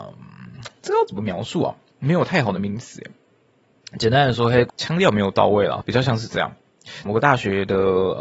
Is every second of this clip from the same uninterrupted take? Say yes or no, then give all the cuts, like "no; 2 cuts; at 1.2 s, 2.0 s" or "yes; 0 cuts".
no; 2 cuts; at 5.8 s, 7.1 s